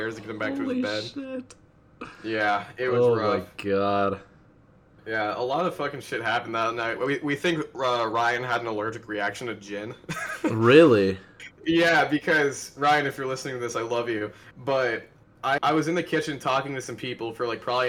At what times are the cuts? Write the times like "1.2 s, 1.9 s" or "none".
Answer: 15.6 s